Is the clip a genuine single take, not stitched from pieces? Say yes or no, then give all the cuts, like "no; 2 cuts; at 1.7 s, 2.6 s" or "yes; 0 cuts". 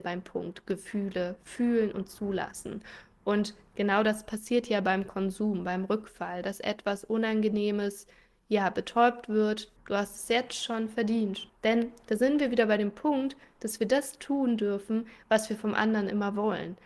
no; 2 cuts; at 9.8 s, 11.5 s